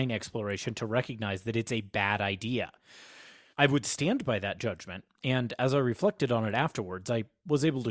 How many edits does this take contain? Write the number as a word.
one